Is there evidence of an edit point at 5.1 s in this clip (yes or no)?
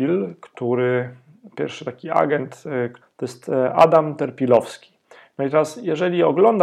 no